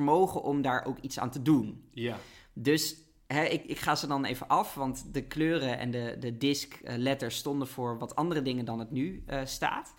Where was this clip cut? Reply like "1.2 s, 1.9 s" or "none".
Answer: none